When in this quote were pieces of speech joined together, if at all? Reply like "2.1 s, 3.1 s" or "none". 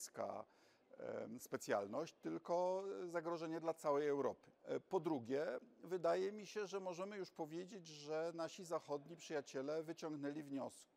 4.6 s